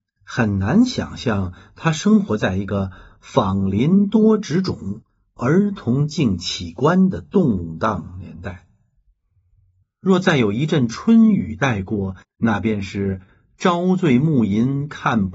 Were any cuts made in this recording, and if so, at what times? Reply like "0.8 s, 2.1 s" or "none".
9.8 s, 12.2 s